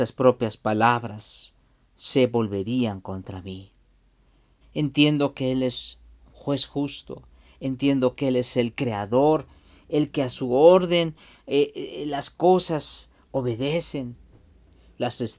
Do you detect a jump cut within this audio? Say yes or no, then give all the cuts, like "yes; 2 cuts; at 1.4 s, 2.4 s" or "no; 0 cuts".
yes; 1 cut; at 4.6 s